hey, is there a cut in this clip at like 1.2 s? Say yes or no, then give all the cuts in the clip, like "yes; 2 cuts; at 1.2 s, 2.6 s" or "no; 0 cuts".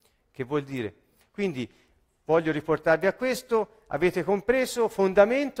yes; 1 cut; at 1.2 s